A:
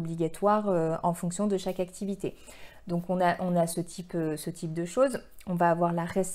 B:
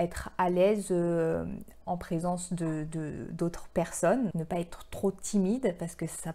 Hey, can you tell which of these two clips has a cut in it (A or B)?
B